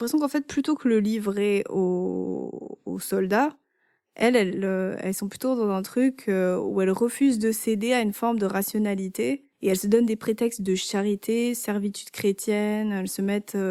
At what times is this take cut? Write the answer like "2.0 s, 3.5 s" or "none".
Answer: none